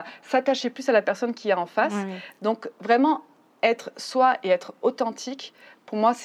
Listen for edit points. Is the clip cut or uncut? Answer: uncut